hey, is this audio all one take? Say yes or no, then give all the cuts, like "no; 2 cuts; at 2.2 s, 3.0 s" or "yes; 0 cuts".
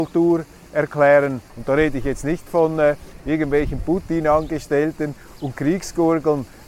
no; 1 cut; at 1.5 s